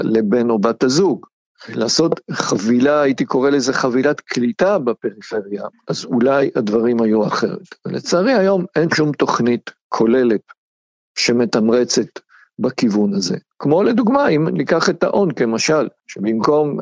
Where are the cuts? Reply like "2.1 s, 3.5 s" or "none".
none